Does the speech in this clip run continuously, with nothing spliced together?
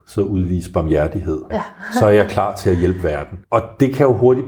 no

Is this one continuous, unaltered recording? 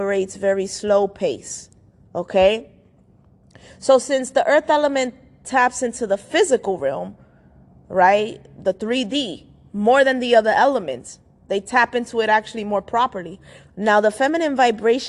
no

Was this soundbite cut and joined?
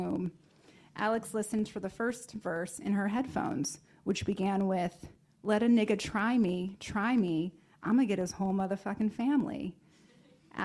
no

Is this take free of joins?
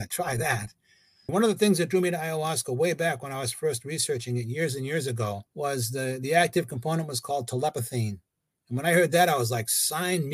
no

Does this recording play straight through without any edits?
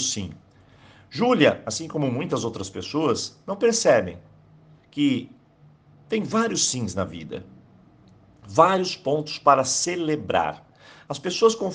yes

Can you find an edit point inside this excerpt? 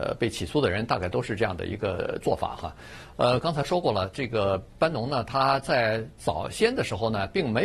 no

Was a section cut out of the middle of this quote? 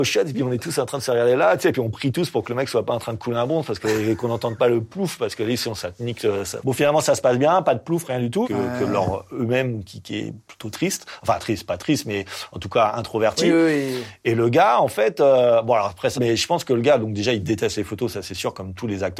yes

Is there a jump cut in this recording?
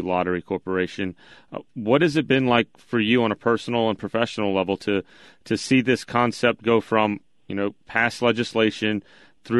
no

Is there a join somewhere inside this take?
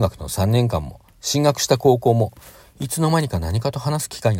yes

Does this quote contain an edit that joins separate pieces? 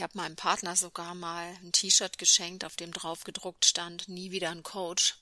no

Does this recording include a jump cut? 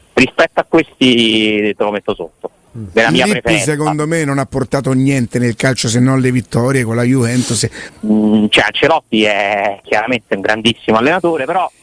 yes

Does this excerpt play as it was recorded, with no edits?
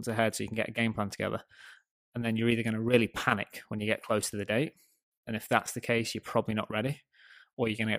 yes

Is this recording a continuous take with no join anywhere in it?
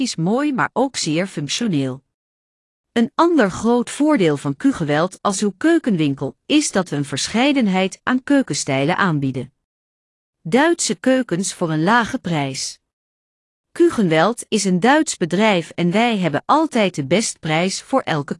yes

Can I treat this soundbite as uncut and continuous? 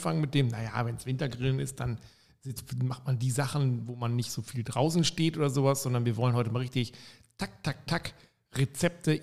yes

